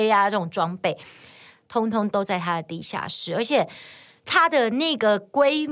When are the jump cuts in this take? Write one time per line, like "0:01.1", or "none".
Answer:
none

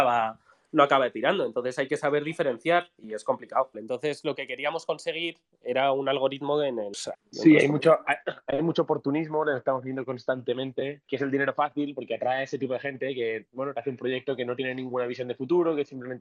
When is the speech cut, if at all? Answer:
0:03.7
0:07.1
0:11.1

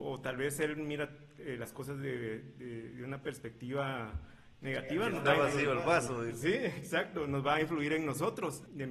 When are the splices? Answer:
none

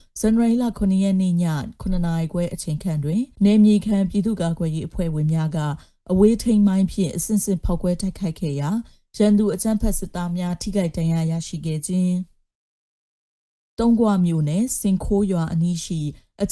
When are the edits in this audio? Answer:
0:03.3

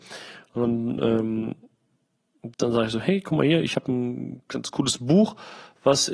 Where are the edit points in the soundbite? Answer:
0:02.5

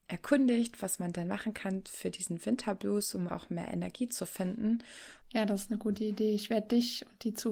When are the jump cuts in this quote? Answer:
0:03.3
0:05.2

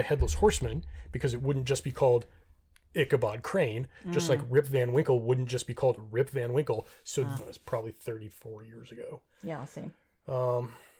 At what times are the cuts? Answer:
0:07.4

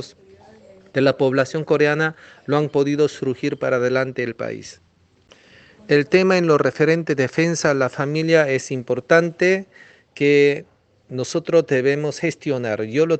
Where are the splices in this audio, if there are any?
none

